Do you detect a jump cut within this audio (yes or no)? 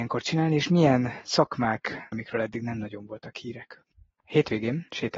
yes